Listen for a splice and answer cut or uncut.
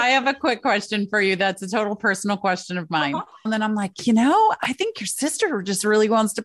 cut